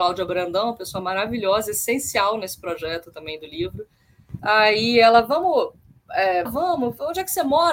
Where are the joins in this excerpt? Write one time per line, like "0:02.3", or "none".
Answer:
0:04.4
0:06.5